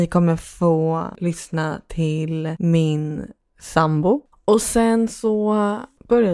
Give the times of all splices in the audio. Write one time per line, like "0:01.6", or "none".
0:04.3